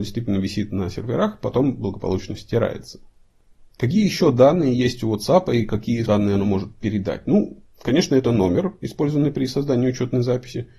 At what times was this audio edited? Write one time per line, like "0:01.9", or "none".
0:06.1